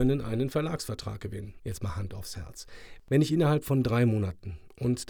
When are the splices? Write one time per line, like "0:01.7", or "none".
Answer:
0:01.6